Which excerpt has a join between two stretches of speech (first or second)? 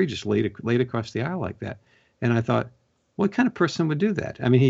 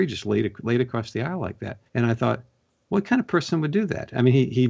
second